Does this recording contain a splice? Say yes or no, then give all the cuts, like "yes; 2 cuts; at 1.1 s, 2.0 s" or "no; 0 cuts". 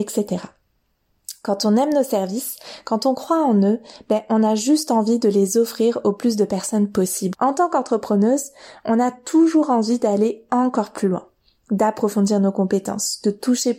yes; 1 cut; at 7.3 s